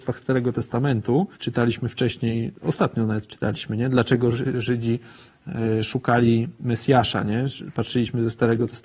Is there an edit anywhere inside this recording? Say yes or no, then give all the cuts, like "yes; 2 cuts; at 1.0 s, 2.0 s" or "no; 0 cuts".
yes; 1 cut; at 1.3 s